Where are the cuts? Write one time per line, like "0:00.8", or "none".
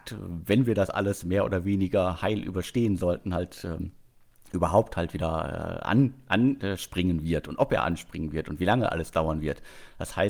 none